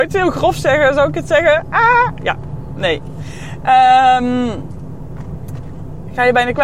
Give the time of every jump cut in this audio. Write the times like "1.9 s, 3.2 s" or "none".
none